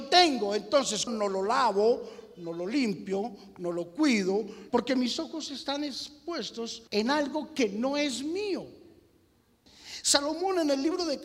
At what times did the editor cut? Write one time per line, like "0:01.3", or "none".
0:01.1
0:04.7
0:06.9